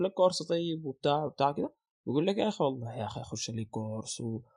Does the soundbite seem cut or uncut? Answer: cut